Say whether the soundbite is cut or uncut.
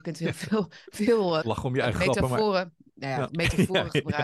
cut